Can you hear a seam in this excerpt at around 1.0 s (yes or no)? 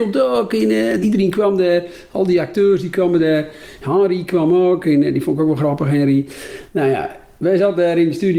yes